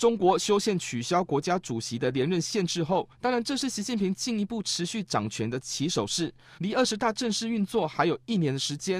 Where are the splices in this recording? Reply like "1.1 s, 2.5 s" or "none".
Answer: 6.6 s

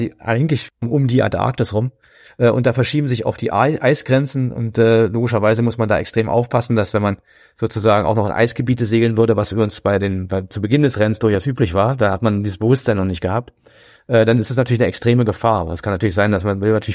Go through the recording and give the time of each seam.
none

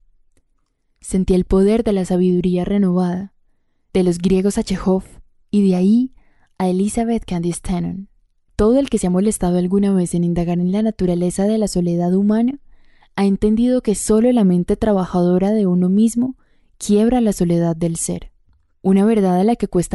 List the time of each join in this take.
none

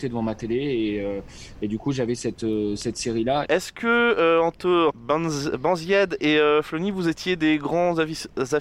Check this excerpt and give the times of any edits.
3.4 s, 4.9 s

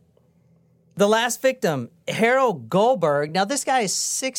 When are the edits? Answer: none

